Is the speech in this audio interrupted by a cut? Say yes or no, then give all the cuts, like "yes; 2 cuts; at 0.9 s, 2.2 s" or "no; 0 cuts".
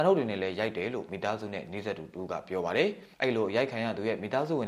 yes; 1 cut; at 3.1 s